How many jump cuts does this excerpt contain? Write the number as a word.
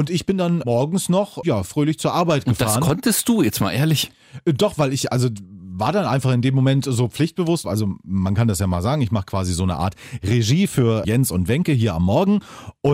one